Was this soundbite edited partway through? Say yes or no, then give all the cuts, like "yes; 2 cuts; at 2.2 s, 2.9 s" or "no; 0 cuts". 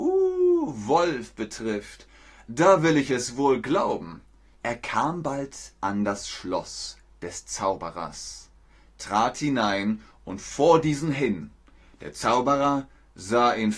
yes; 1 cut; at 4.5 s